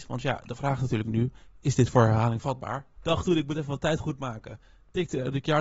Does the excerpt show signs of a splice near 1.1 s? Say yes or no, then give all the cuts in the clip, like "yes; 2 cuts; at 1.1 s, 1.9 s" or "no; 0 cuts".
no; 1 cut; at 3.0 s